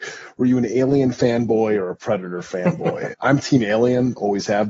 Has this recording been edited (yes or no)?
yes